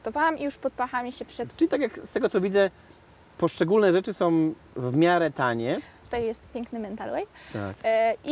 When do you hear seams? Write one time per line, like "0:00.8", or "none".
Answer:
0:01.5
0:06.0